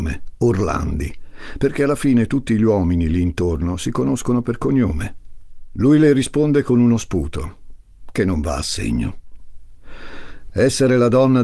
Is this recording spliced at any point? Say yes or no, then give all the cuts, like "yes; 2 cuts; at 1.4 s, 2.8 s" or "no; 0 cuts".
no; 0 cuts